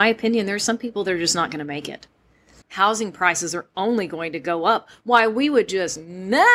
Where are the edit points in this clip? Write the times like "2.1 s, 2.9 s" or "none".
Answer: 2.6 s